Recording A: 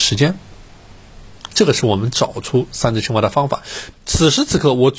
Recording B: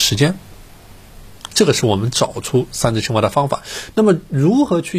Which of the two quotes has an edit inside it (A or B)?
A